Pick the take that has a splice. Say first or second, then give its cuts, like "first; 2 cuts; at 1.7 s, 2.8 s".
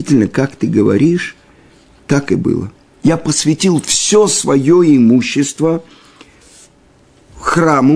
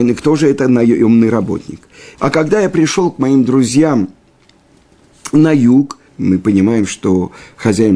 second; 2 cuts; at 2.1 s, 6.1 s